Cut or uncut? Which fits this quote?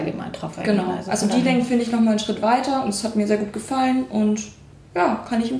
uncut